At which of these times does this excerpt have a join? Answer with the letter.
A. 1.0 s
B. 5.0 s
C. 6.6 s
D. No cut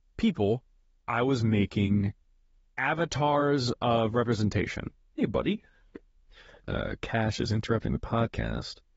C